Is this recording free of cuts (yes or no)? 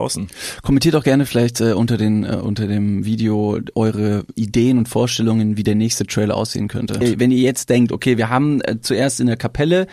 no